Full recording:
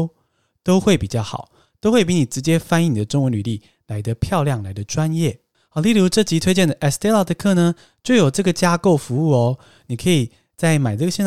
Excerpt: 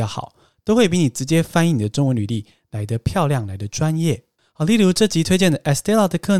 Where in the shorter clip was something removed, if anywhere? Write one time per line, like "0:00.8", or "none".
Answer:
none